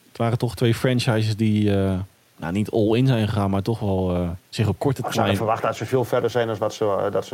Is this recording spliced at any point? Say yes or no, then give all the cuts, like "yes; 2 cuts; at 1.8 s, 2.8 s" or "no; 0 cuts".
yes; 1 cut; at 4.5 s